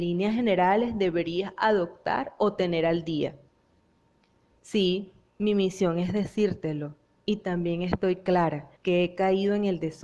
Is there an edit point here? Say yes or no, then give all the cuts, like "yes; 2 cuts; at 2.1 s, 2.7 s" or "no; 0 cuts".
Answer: yes; 2 cuts; at 4.5 s, 8.8 s